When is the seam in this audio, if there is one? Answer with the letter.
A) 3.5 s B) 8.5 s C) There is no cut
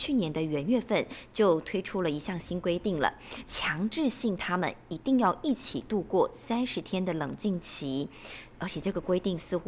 A